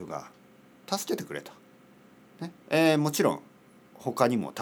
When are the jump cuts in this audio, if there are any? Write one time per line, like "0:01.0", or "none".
0:02.6